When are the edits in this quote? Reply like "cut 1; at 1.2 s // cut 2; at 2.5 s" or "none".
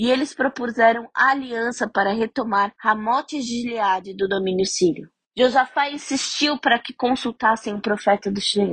none